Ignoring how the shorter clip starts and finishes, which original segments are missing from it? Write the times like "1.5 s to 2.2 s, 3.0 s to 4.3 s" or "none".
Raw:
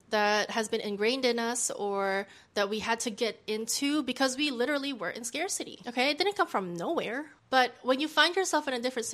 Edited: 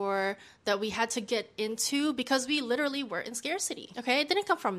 none

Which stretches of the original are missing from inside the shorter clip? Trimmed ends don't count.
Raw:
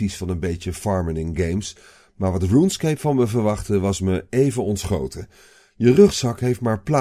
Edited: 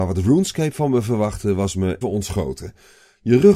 4.3 s to 4.6 s

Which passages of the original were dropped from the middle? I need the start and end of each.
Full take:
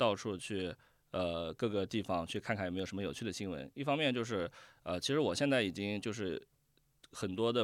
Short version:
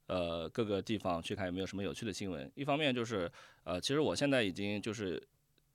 2.4 s to 2.6 s

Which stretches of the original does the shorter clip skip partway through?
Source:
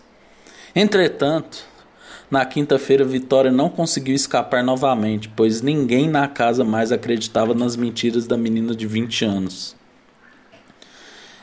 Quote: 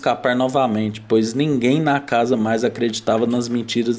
none

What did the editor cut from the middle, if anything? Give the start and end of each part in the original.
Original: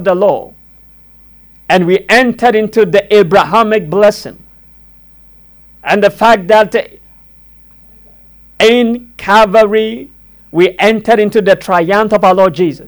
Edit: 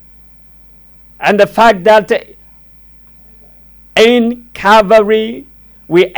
none

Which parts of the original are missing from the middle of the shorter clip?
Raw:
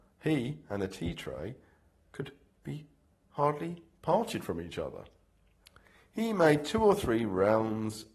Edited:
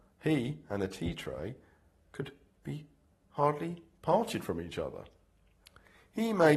none

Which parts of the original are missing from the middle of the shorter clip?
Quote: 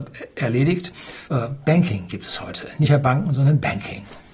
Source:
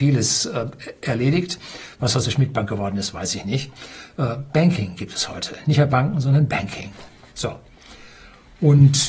1.9 s to 4.1 s

